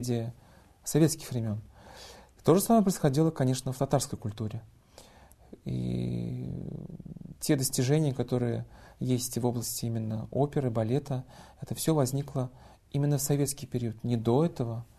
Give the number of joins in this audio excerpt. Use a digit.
0